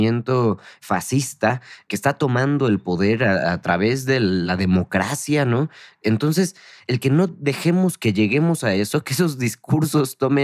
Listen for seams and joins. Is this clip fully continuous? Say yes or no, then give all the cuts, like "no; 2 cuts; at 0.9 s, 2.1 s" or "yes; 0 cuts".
yes; 0 cuts